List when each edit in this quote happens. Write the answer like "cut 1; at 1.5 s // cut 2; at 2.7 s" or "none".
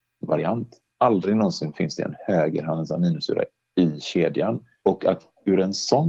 cut 1; at 0.9 s // cut 2; at 4.8 s